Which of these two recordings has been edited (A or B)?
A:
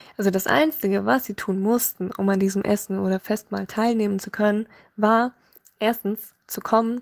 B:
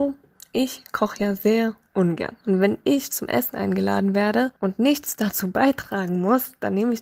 B